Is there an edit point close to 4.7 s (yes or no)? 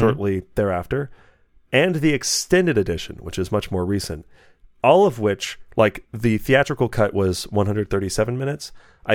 no